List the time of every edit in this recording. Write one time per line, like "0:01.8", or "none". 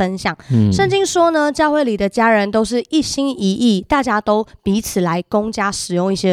none